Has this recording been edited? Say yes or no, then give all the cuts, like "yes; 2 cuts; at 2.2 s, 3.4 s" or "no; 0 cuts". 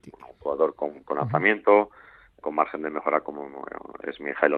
yes; 1 cut; at 2.4 s